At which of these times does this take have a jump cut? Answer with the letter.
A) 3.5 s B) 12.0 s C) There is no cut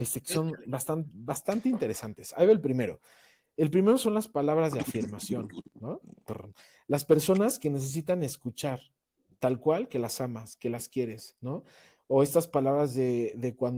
C